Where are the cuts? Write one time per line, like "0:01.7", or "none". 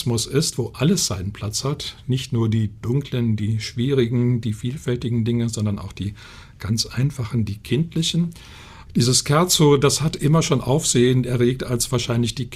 0:08.9